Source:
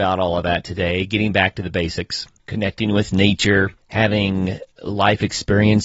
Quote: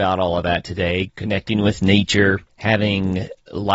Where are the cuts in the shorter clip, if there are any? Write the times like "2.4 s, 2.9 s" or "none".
1.1 s